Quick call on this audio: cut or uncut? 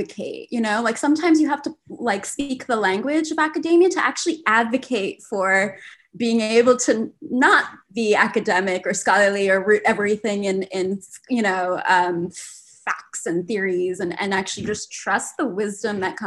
uncut